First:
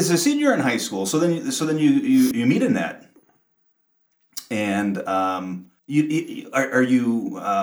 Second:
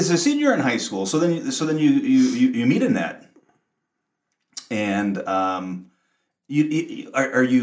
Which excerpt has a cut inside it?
first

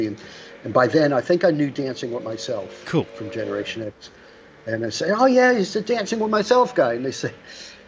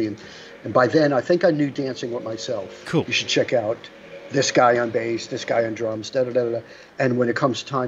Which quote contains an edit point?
second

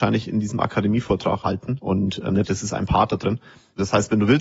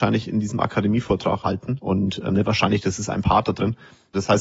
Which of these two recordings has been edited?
first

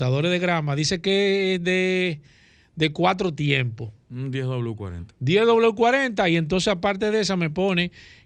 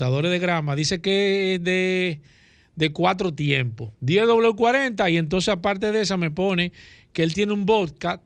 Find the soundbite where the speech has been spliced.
second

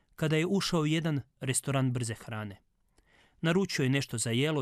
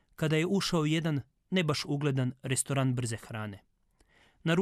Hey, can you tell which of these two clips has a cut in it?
first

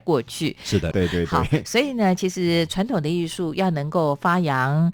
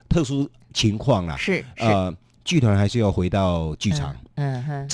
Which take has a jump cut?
first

